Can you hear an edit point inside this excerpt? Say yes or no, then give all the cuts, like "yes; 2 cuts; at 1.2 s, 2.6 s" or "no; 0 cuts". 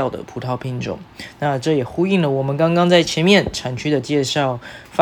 no; 0 cuts